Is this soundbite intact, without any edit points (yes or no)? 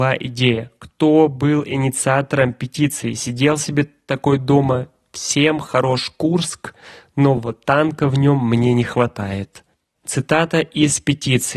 yes